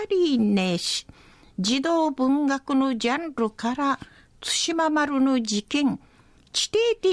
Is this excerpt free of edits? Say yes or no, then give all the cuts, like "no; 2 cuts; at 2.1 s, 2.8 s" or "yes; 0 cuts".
yes; 0 cuts